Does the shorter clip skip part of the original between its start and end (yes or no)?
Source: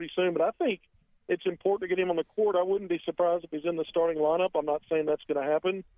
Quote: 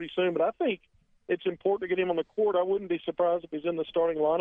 no